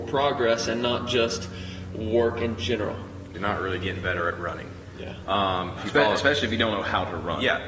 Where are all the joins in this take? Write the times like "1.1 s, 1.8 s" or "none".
3.3 s, 5.8 s